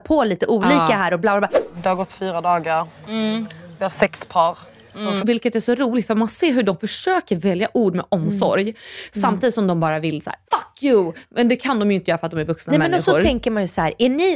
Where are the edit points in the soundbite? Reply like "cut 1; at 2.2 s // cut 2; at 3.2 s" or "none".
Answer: cut 1; at 5.2 s // cut 2; at 10.5 s